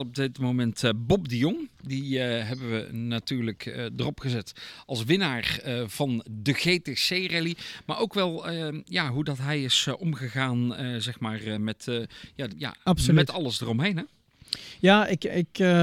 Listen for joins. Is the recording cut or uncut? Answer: cut